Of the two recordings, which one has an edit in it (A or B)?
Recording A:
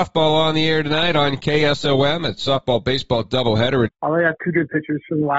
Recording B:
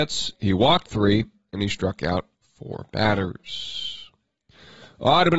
A